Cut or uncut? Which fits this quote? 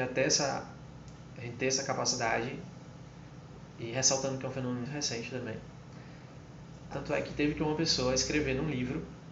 cut